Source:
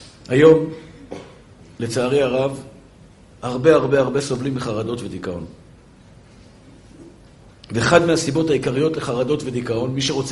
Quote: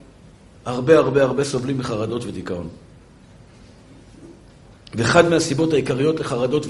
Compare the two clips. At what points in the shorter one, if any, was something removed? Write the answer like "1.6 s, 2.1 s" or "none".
none

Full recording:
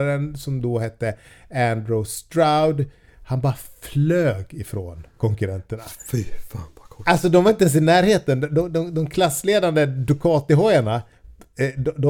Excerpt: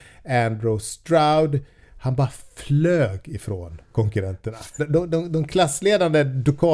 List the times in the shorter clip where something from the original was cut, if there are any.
4.8 s

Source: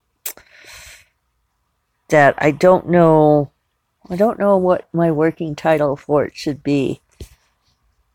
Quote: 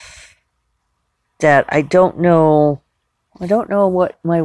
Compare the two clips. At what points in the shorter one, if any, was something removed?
none

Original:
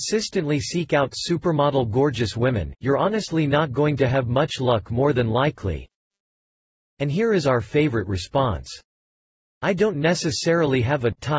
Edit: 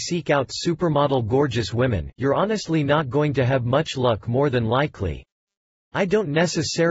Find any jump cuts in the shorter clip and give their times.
5.9 s

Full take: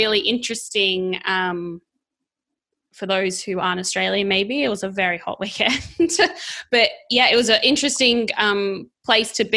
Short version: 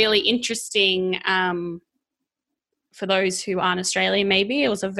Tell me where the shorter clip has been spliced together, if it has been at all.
none

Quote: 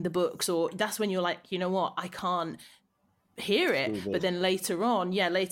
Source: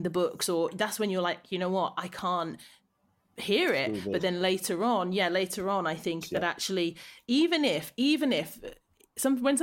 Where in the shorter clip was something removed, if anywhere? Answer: none

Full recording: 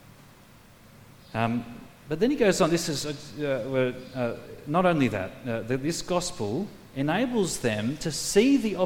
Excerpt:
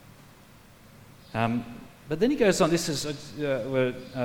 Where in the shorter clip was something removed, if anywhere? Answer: none

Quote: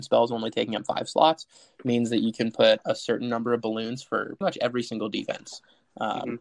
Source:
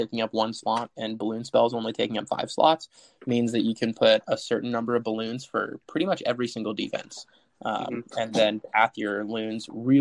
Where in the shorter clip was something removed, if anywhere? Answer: 4.4 s

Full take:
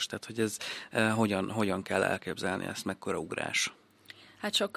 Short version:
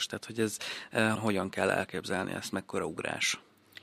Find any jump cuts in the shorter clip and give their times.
1.2 s

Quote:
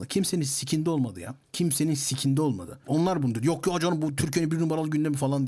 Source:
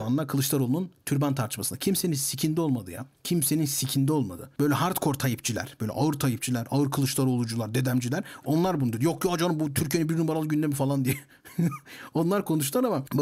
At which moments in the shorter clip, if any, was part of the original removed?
2.8 s

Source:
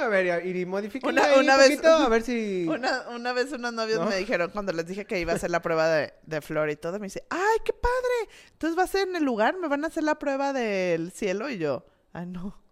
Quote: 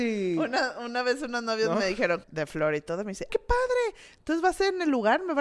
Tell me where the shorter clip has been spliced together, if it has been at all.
2.2 s, 3.3 s

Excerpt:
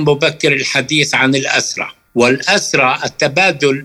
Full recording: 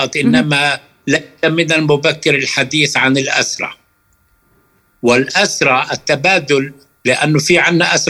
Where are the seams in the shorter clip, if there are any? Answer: 2.1 s

